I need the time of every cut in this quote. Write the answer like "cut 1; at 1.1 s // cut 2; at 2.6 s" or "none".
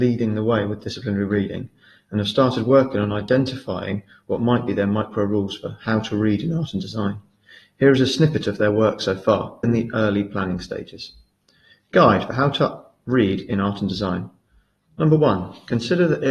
cut 1; at 9.6 s